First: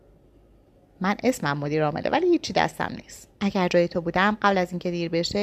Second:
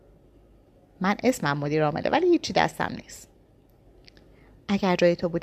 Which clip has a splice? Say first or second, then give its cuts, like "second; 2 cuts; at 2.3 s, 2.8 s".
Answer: first; 1 cut; at 3.3 s